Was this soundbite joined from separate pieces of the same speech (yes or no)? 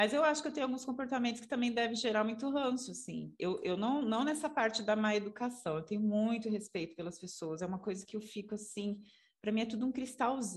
no